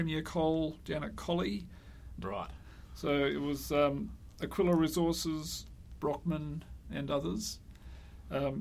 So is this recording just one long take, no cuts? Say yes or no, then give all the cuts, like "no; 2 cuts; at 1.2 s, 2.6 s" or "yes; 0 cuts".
no; 2 cuts; at 2.2 s, 6.0 s